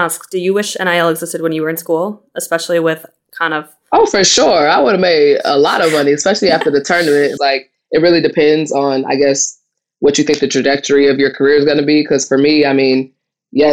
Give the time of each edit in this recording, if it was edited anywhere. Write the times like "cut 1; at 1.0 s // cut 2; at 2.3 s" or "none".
cut 1; at 7.4 s